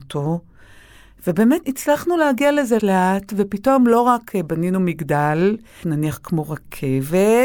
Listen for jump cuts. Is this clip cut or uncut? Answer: cut